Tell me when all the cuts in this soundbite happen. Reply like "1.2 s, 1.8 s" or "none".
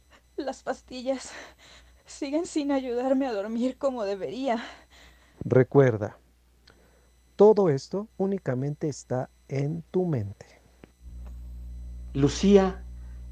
5.3 s, 8.1 s